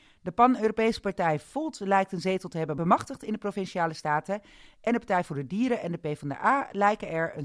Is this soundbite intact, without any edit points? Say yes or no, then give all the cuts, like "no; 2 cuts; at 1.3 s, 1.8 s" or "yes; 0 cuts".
yes; 0 cuts